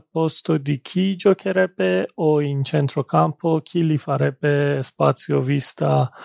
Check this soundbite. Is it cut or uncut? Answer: uncut